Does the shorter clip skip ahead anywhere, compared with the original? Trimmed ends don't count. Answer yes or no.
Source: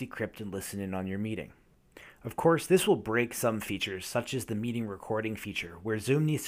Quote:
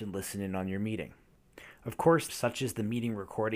yes